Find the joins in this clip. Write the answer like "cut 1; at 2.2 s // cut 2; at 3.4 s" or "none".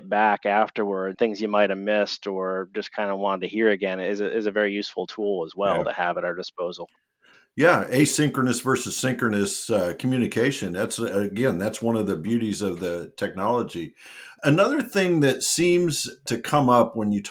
cut 1; at 1.1 s

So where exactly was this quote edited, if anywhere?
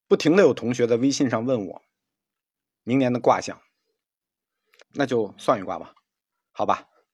cut 1; at 4.8 s

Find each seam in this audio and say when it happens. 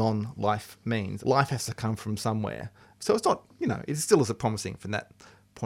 cut 1; at 1.2 s // cut 2; at 3.0 s

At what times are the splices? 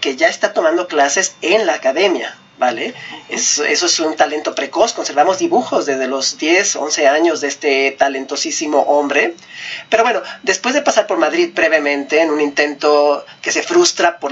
none

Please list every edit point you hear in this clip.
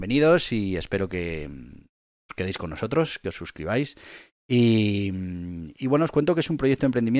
none

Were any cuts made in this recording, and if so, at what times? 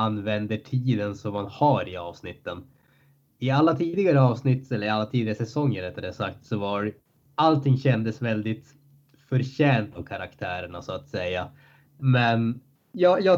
cut 1; at 12.0 s

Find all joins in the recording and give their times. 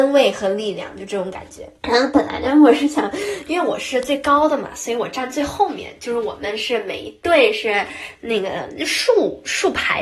cut 1; at 1.8 s

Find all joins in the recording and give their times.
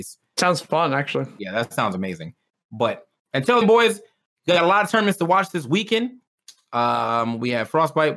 cut 1; at 3.6 s

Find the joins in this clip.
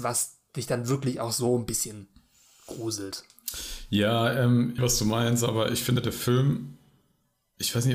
cut 1; at 4.8 s

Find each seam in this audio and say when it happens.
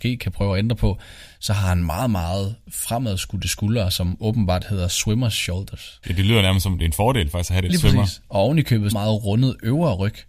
cut 1; at 6.0 s // cut 2; at 7.7 s // cut 3; at 8.9 s

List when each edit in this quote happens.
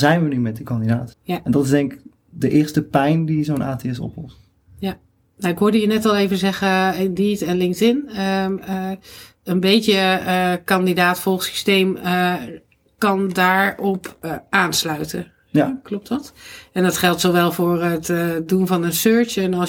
cut 1; at 1.1 s

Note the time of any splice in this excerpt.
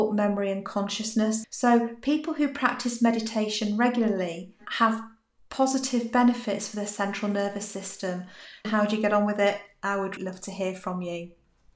cut 1; at 1.4 s // cut 2; at 8.6 s // cut 3; at 10.2 s

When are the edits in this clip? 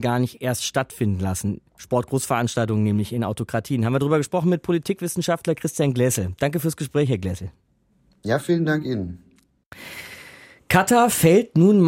none

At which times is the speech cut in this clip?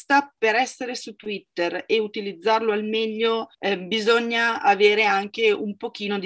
cut 1; at 3.5 s

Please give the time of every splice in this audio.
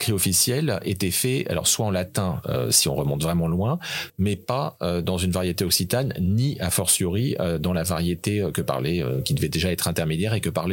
cut 1; at 4.1 s

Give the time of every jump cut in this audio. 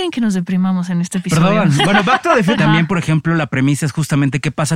cut 1; at 2.6 s

